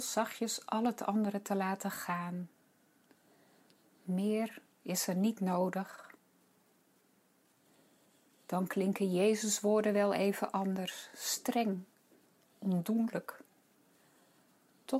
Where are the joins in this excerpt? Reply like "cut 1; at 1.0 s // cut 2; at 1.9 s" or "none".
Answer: none